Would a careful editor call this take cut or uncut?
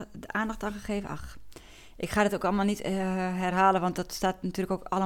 uncut